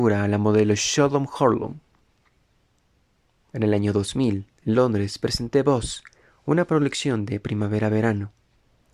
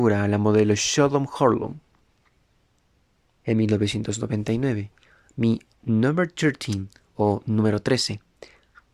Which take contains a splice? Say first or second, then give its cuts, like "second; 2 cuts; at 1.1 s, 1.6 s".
second; 1 cut; at 3.4 s